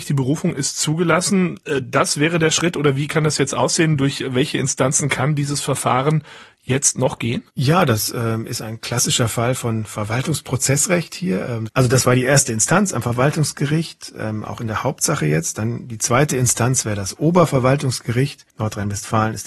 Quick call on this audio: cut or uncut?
cut